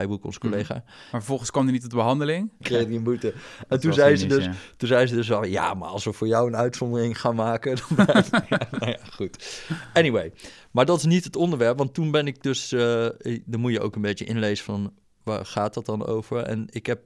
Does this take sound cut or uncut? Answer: cut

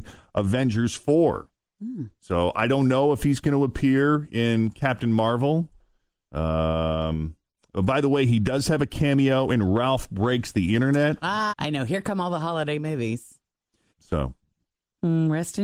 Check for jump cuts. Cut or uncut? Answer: cut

